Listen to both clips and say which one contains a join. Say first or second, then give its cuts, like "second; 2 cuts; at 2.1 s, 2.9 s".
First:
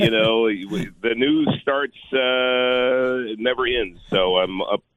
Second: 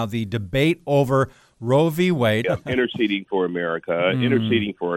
second; 1 cut; at 2.4 s